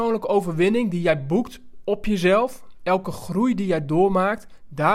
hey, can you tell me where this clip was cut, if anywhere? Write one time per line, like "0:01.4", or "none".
none